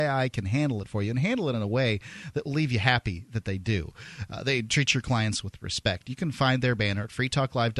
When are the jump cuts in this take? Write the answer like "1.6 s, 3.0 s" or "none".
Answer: none